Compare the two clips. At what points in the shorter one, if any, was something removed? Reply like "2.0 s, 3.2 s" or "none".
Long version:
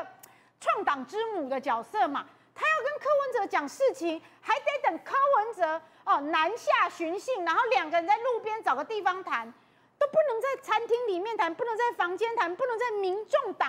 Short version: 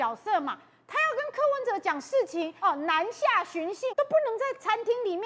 2.6 s, 3.9 s